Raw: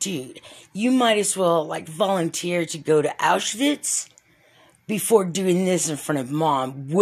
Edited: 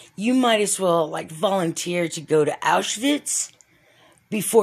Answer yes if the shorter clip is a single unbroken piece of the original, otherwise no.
yes